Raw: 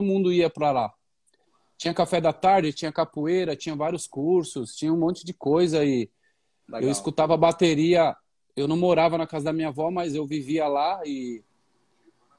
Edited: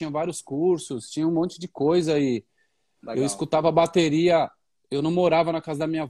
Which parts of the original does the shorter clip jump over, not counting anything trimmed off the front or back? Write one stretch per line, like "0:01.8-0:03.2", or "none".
none